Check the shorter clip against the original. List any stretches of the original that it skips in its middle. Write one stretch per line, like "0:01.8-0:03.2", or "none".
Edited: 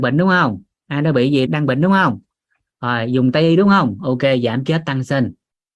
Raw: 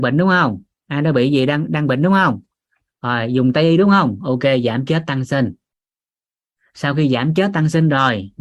0:01.5-0:01.7